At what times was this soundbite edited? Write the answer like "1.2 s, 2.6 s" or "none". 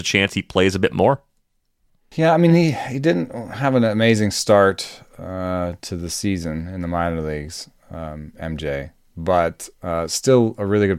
none